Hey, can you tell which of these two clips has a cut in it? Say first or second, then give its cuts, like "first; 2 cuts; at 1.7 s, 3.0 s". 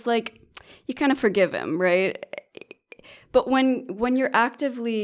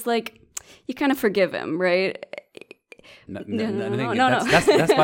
second; 1 cut; at 3.3 s